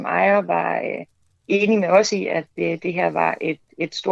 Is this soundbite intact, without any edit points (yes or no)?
yes